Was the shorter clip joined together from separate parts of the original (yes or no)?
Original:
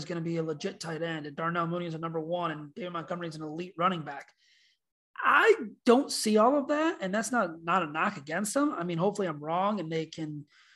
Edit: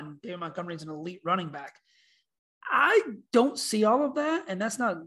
no